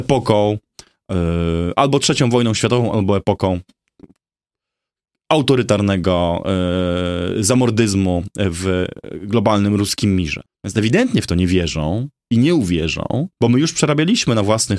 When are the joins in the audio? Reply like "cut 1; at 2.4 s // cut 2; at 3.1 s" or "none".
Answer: cut 1; at 10.5 s // cut 2; at 13.3 s